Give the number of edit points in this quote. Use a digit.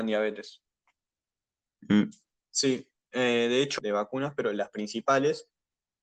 2